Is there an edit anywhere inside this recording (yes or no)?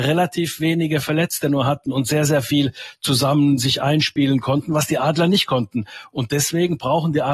no